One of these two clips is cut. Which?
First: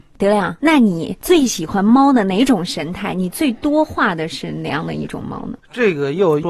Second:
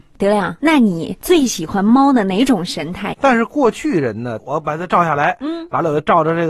second; 2 cuts; at 3.1 s, 4.4 s

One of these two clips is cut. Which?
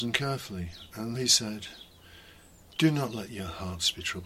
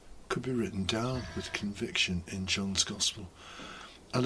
first; 1 cut; at 1.1 s

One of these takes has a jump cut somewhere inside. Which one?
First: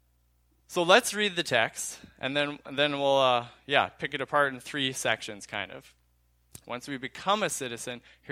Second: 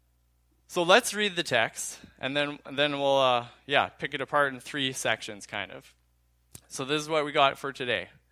first; 1 cut; at 6.6 s

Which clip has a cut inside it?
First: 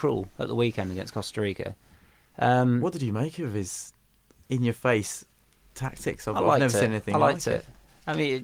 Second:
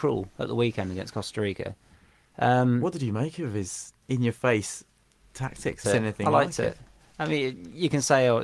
second; 2 cuts; at 4.0 s, 5.8 s

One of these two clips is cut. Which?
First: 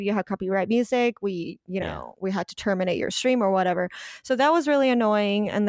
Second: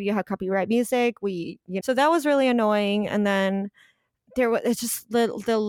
second; 1 cut; at 1.8 s

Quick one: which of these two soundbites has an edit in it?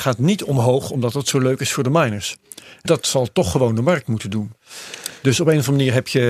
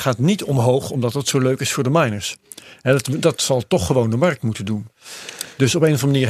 first; 1 cut; at 2.9 s

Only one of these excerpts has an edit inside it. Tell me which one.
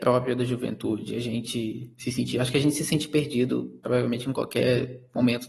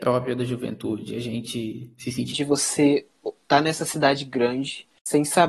second; 1 cut; at 2.3 s

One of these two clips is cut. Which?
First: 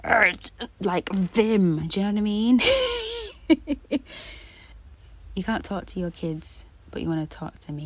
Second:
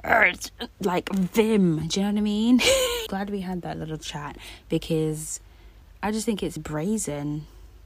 second; 2 cuts; at 3.1 s, 6.6 s

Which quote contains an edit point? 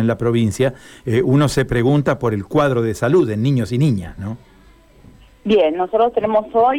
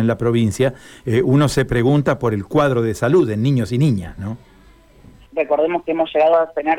second; 1 cut; at 5.3 s

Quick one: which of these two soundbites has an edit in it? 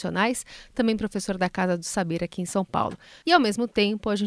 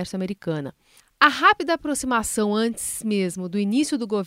first; 1 cut; at 3.2 s

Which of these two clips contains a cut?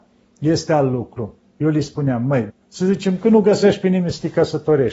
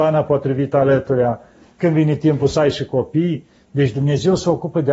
first; 1 cut; at 2.5 s

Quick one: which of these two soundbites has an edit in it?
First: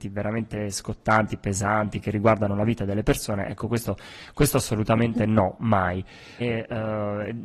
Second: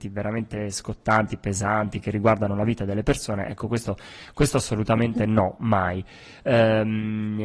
first; 1 cut; at 6.4 s

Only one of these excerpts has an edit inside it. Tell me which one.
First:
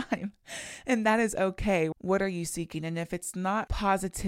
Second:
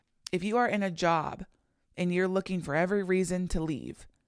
first; 1 cut; at 1.9 s

